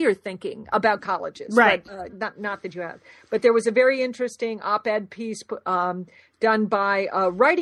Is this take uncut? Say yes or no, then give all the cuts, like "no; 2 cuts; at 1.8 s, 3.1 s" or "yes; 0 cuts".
no; 1 cut; at 2.1 s